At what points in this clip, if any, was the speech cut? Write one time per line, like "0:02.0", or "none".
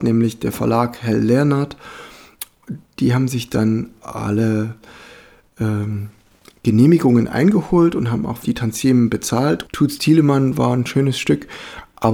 0:08.4
0:09.6